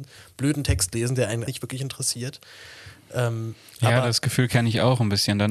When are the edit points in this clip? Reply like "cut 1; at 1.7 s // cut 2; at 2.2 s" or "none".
cut 1; at 1.5 s